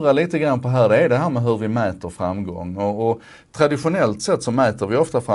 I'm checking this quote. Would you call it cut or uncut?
uncut